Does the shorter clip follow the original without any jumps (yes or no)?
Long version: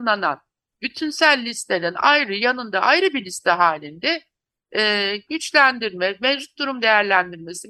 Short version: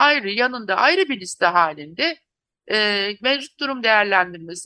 no